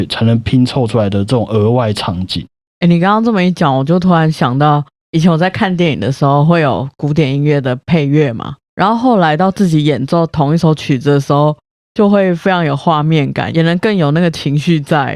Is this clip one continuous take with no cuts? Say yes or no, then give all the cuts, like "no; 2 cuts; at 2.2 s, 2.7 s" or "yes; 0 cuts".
no; 1 cut; at 8.6 s